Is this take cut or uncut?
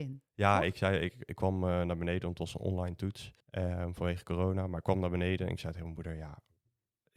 cut